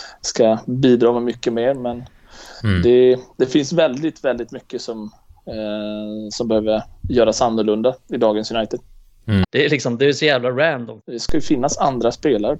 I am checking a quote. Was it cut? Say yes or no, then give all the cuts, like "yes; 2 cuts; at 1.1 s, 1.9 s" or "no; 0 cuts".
yes; 2 cuts; at 9.4 s, 11.0 s